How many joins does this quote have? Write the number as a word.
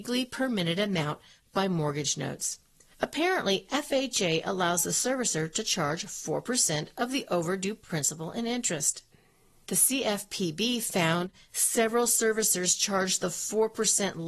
one